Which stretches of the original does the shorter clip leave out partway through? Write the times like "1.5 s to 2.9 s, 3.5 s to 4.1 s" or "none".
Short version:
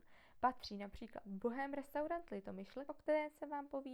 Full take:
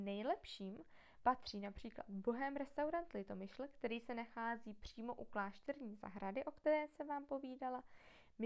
3.7 s to 6.4 s